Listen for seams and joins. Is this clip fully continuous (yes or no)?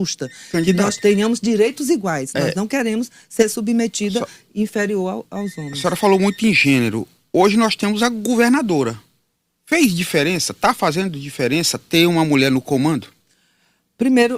yes